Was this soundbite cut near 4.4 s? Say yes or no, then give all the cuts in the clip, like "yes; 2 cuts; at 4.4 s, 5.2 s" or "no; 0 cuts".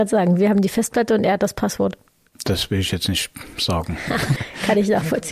yes; 1 cut; at 4.4 s